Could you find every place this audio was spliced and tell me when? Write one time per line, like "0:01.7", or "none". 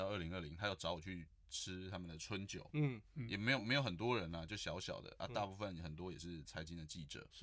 none

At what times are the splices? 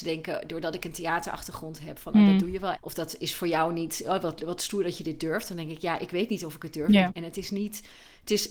0:02.7
0:07.1

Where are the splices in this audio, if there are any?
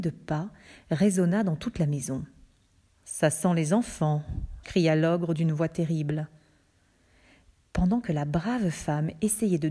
0:02.9
0:04.6

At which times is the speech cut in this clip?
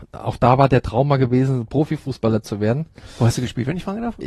none

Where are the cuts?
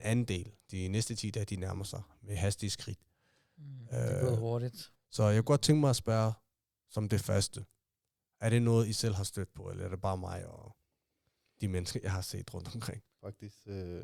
0:04.9

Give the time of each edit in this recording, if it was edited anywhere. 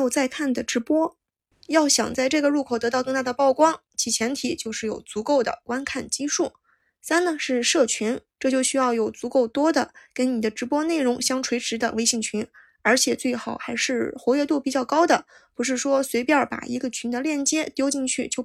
0:08.3

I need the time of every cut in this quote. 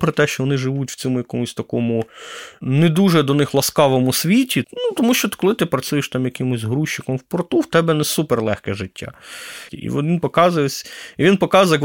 0:04.6
0:09.7

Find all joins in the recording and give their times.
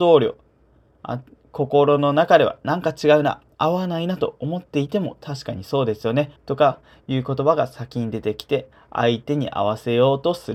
0:06.4

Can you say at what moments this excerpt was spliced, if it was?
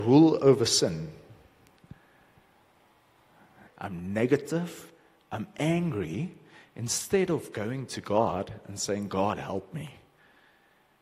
0:03.7

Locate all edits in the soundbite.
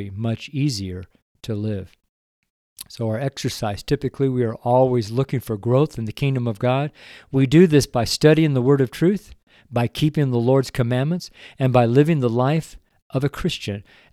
none

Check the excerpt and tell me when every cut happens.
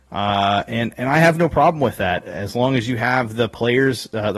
none

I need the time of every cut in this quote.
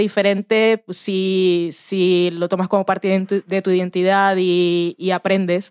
none

